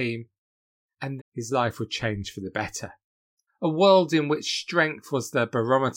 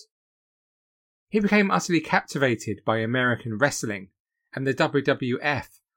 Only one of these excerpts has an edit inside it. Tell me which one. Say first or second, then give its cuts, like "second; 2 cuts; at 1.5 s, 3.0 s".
first; 2 cuts; at 1.2 s, 3.5 s